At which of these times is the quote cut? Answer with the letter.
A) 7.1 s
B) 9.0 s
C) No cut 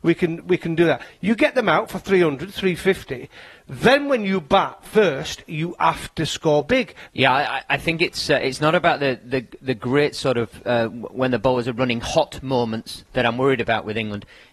A